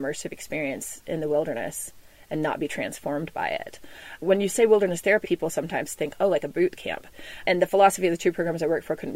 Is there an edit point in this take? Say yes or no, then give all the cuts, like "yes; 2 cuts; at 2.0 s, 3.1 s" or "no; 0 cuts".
yes; 1 cut; at 5.2 s